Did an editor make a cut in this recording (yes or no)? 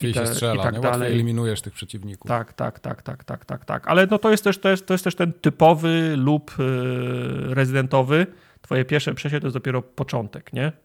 no